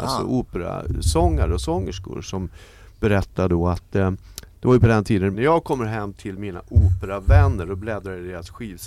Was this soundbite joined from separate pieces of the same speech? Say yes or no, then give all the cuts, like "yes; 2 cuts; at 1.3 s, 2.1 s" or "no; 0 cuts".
yes; 1 cut; at 5.3 s